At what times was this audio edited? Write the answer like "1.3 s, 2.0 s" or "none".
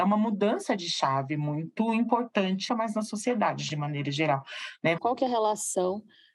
2.7 s, 5.0 s

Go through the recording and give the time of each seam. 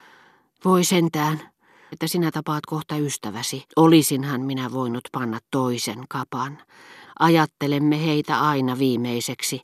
1.9 s, 3.7 s, 7.0 s

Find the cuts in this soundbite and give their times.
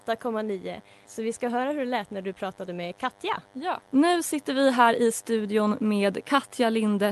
1.1 s, 3.9 s

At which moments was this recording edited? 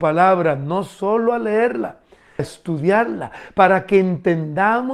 2.4 s

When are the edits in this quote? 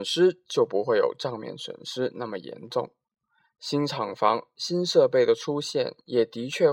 none

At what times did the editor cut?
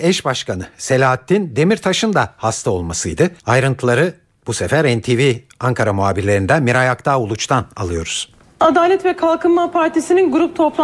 3.4 s

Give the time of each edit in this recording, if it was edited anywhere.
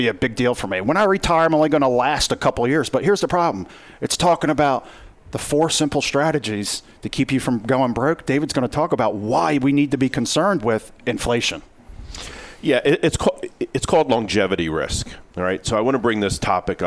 none

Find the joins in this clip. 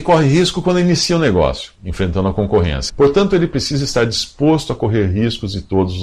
1.8 s, 2.9 s

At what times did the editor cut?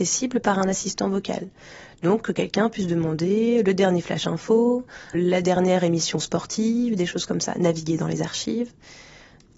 5.1 s

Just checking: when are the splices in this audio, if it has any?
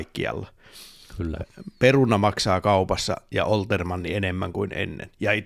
none

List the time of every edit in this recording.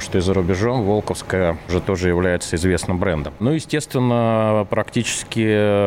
none

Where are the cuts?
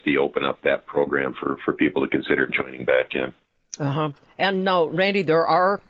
none

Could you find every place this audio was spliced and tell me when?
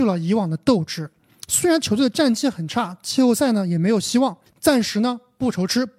4.5 s

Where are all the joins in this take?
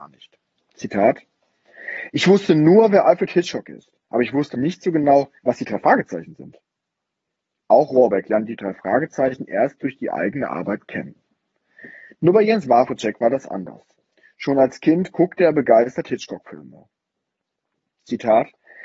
4.5 s

